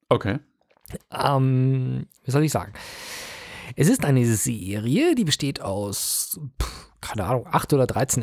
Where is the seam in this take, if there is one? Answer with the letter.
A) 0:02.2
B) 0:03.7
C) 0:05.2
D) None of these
A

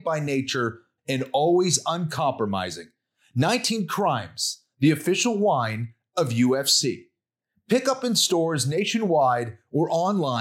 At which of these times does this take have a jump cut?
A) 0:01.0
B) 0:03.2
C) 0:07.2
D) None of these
A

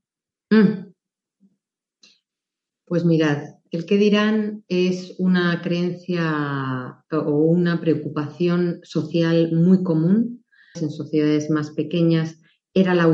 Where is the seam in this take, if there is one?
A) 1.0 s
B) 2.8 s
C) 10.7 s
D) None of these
C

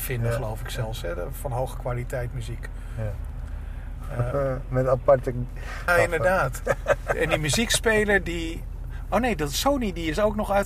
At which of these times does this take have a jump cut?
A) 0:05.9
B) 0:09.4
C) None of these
A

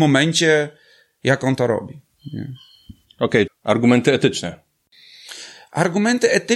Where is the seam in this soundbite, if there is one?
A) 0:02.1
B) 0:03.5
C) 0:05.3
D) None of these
B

